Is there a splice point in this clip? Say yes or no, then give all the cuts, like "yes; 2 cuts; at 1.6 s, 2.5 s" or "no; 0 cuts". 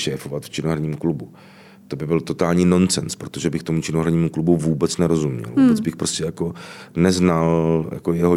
no; 0 cuts